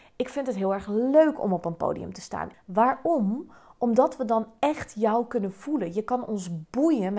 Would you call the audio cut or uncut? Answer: cut